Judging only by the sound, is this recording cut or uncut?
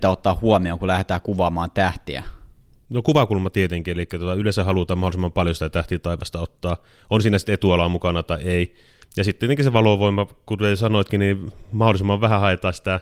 uncut